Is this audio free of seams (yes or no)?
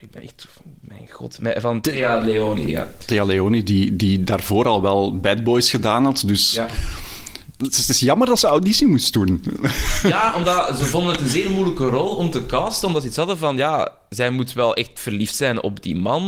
yes